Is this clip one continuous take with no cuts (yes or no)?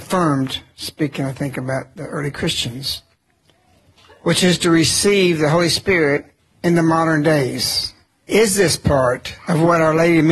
yes